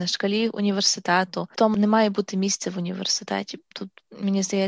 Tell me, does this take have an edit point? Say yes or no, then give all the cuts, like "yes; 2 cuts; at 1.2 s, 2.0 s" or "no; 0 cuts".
no; 0 cuts